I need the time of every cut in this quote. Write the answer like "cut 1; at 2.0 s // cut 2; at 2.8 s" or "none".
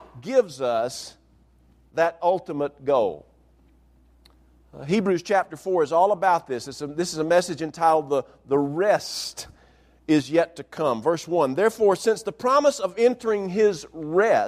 none